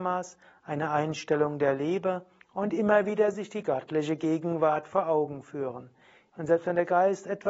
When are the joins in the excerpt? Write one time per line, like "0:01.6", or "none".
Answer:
0:06.3